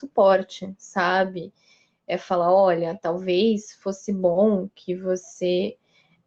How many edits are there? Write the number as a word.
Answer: zero